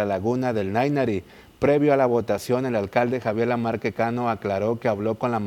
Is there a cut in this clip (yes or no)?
no